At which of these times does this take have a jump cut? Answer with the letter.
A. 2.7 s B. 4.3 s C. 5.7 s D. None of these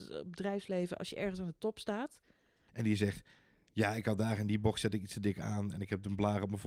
A